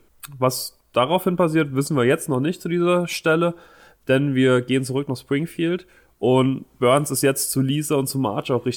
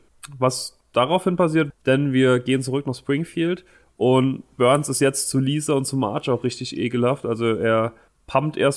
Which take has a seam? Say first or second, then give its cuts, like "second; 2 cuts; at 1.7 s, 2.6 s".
second; 1 cut; at 1.7 s